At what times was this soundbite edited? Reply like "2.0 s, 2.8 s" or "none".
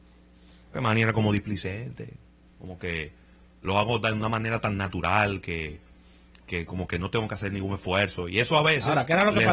none